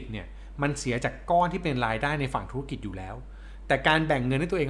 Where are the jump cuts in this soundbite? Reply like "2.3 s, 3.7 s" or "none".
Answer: none